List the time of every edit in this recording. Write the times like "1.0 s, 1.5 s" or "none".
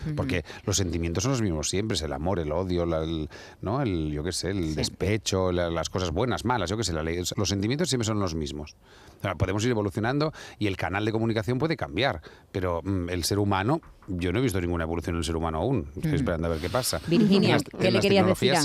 2.3 s, 7.3 s